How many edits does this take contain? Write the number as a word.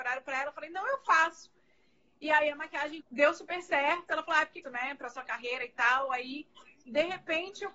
two